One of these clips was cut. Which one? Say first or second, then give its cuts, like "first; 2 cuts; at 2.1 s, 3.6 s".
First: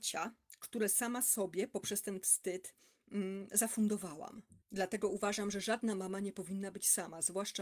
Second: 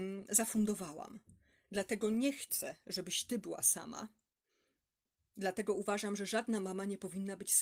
first; 1 cut; at 4.6 s